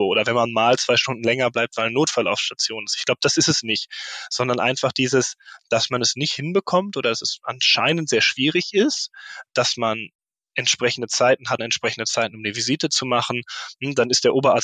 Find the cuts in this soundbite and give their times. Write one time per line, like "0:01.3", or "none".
0:09.5
0:11.6